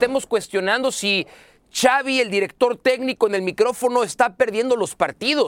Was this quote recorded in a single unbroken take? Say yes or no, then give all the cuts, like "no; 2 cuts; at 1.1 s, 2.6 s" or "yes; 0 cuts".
yes; 0 cuts